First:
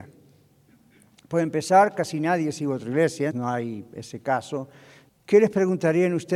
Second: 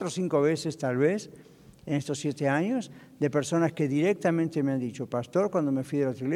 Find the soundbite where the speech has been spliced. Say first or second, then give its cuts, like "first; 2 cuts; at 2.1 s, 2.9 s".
first; 2 cuts; at 3.3 s, 5.1 s